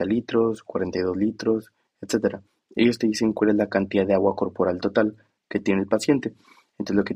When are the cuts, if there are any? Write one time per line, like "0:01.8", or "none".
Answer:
0:01.9